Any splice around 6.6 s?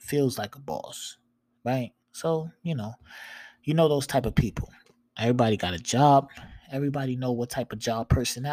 no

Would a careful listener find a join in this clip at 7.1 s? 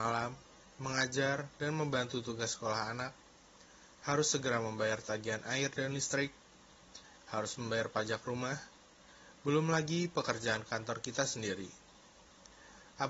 no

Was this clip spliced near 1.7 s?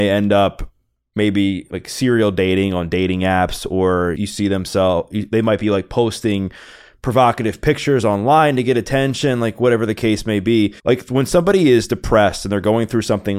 no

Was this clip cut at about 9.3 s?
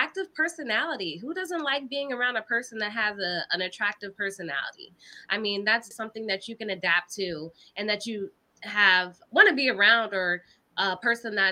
yes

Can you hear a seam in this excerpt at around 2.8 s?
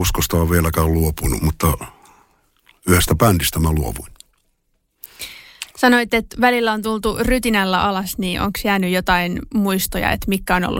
no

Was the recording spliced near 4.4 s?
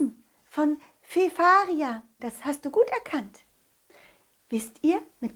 no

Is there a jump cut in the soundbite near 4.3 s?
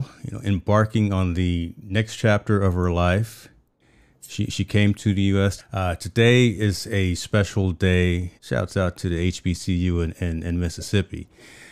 no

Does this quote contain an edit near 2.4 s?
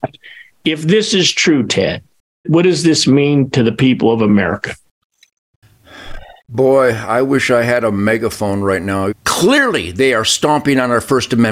yes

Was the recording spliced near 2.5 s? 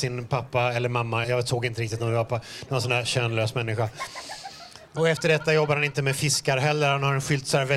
no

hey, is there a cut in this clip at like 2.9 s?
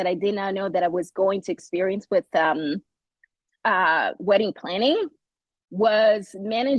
no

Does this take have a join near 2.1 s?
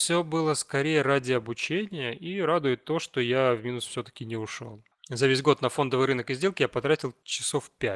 no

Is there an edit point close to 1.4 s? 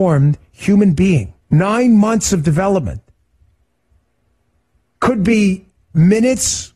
yes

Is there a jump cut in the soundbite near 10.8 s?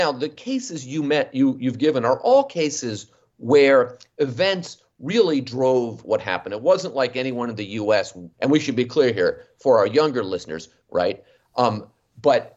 yes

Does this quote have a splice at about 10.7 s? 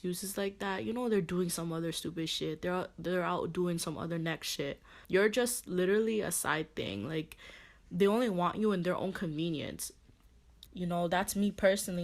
yes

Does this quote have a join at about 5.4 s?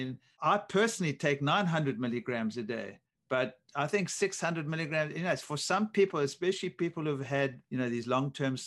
no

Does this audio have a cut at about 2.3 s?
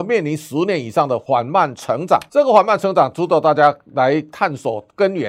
no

